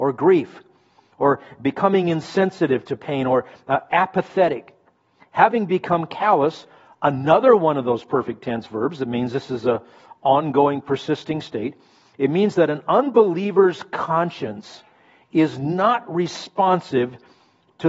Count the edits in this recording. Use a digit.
0